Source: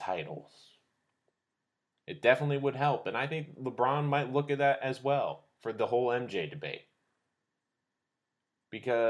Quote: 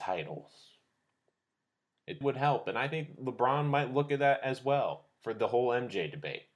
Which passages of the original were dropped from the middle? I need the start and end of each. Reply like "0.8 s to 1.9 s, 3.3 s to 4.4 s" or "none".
2.2 s to 2.6 s